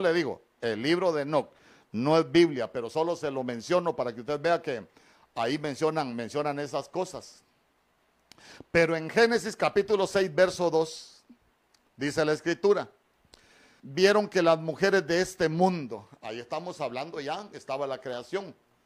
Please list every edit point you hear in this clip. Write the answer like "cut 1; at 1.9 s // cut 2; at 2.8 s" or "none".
cut 1; at 13.8 s